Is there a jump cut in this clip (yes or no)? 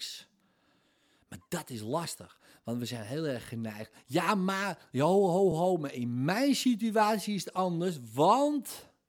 no